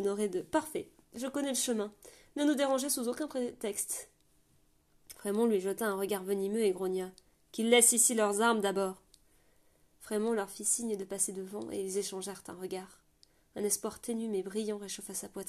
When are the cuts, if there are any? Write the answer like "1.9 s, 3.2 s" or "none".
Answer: 9.9 s

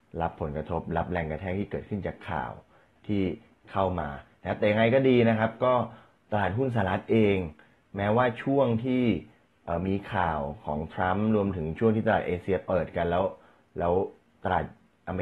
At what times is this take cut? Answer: none

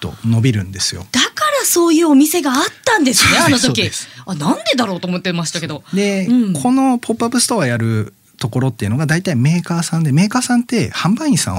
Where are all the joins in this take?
none

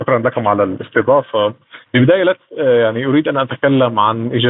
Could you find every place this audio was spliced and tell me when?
1.9 s

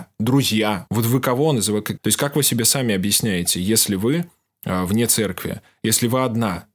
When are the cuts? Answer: 2.0 s

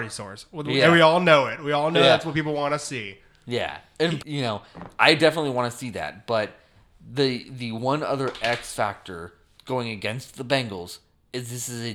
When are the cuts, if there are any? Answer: 4.2 s

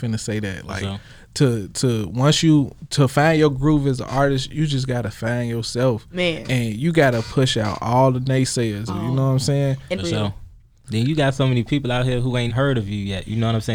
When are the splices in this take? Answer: 8.9 s, 9.9 s, 12.5 s

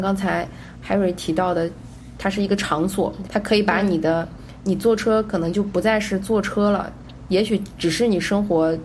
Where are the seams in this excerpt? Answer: 3.3 s

